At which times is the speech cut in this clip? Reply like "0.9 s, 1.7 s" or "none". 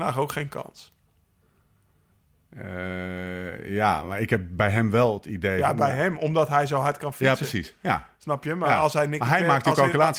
none